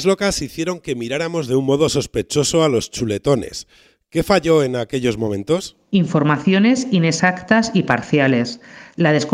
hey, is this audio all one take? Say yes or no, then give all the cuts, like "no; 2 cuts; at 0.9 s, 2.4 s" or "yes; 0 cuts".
yes; 0 cuts